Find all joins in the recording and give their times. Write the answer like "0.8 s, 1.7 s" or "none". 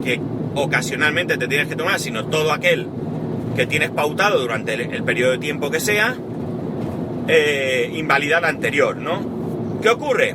none